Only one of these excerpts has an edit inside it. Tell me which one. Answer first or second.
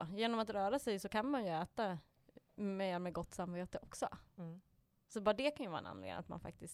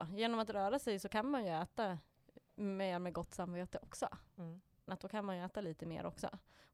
second